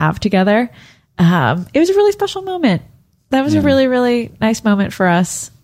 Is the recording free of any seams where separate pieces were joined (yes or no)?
yes